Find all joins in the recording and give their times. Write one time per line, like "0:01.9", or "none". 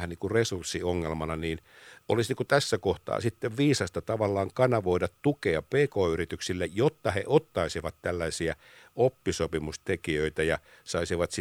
none